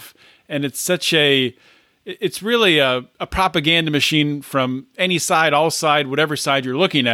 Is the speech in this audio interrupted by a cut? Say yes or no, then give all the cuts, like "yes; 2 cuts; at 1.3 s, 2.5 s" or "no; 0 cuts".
yes; 1 cut; at 3.1 s